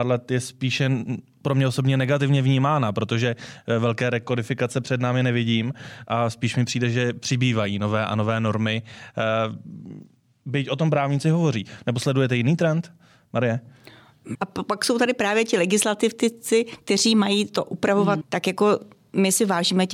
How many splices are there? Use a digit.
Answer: 2